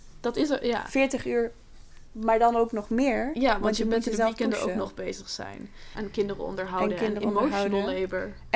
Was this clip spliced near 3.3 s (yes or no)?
no